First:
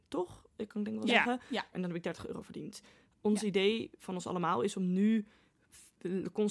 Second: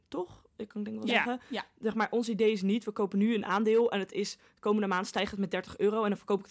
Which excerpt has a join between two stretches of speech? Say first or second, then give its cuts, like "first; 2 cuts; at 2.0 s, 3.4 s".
first; 1 cut; at 1.7 s